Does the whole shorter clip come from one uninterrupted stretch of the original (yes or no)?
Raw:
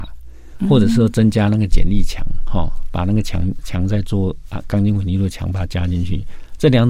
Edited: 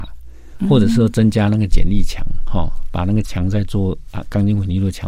no